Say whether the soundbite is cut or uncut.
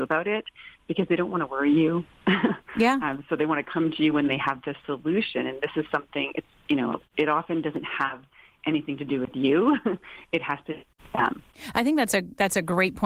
uncut